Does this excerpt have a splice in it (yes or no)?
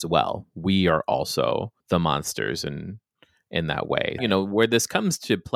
yes